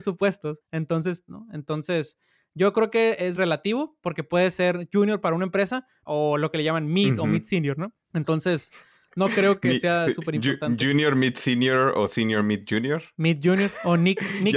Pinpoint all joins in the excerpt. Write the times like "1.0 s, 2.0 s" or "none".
1.3 s, 3.3 s, 6.1 s